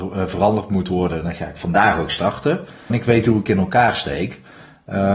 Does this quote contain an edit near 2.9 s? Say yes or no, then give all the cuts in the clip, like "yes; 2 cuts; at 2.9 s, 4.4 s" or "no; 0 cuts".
yes; 1 cut; at 2.9 s